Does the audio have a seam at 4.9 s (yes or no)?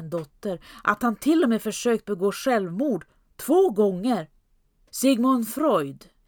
yes